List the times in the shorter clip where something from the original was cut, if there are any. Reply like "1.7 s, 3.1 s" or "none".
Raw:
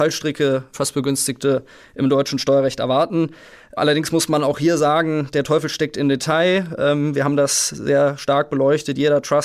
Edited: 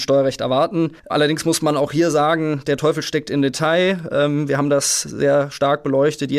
1.0 s